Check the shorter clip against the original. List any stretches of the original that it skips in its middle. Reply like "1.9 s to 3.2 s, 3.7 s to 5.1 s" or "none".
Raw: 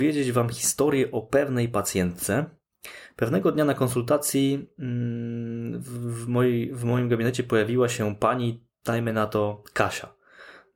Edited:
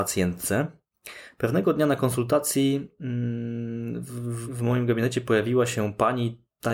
6.2 s to 6.7 s